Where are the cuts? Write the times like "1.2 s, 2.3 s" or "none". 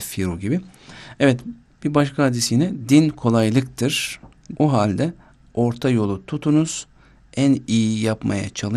4.5 s